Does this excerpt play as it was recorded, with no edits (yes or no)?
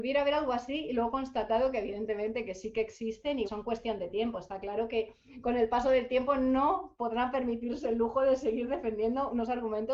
no